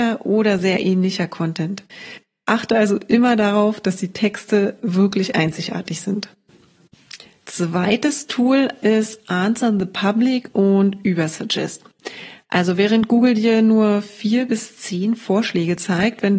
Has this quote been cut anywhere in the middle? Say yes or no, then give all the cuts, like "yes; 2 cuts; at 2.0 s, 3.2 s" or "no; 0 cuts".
no; 0 cuts